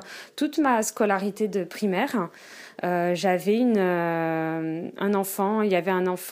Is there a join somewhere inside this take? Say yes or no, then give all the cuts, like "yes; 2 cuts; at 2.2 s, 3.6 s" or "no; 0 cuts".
no; 0 cuts